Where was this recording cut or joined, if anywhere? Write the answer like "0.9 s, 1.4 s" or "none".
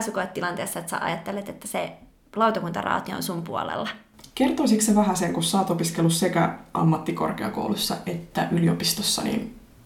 none